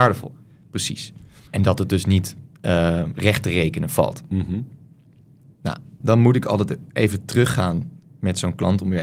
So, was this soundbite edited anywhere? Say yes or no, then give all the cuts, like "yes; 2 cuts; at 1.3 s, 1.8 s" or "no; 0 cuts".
yes; 2 cuts; at 1.5 s, 6.0 s